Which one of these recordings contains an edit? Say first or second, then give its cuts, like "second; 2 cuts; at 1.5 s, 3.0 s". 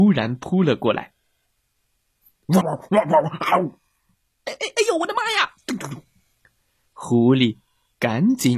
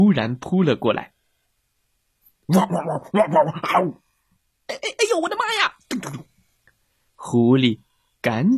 first; 1 cut; at 2.6 s